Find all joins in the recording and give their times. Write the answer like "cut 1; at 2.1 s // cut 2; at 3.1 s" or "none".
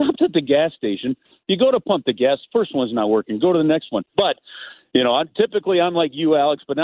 cut 1; at 4.1 s